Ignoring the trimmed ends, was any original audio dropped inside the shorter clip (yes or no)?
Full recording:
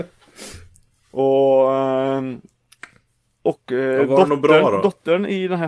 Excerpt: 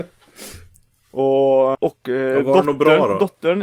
yes